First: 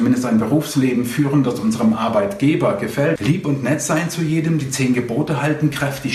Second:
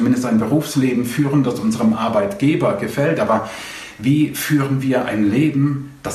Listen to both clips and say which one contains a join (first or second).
first